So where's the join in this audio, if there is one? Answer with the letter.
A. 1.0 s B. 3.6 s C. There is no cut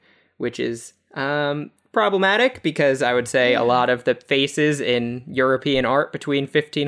C